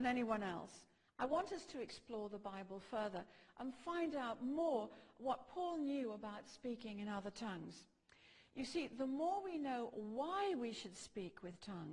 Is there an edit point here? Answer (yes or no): yes